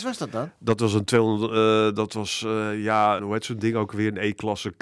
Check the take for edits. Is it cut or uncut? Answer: cut